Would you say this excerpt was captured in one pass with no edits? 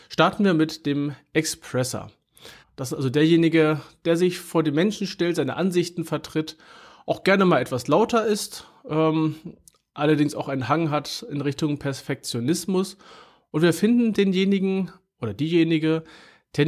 no; 1 cut; at 2.6 s

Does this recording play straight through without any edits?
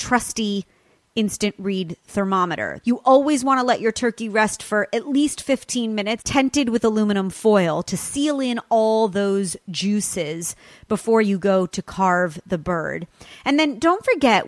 no; 2 cuts; at 2.8 s, 6.2 s

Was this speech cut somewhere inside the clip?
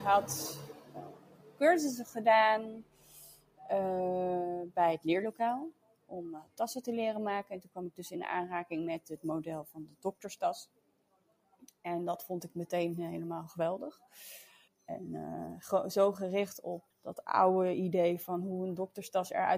yes; 2 cuts; at 14.7 s, 16.9 s

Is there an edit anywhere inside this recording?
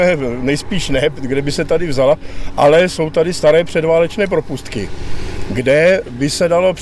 no; 0 cuts

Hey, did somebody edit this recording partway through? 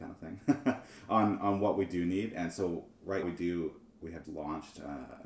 yes; 2 cuts; at 3.2 s, 4.2 s

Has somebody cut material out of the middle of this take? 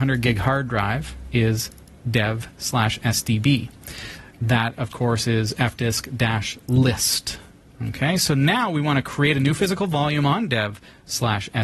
yes; 1 cut; at 4.3 s

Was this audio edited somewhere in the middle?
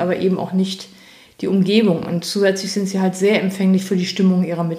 no; 0 cuts

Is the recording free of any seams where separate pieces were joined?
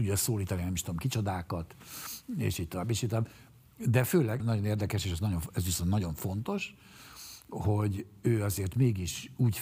no; 1 cut; at 4.4 s

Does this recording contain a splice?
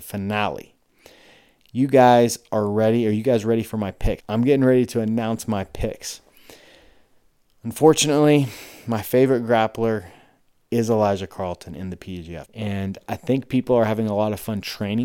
yes; 2 cuts; at 4.2 s, 12.4 s

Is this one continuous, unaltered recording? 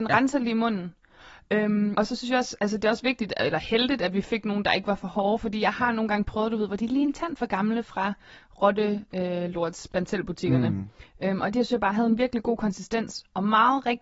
no; 1 cut; at 1.9 s

